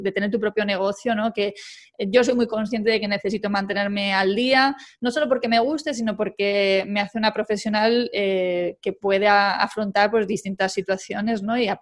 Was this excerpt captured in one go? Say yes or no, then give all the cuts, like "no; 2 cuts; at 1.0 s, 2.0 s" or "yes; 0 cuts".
yes; 0 cuts